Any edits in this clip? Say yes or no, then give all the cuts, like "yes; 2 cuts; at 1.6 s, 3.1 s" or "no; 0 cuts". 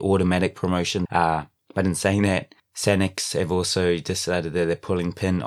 yes; 1 cut; at 1.1 s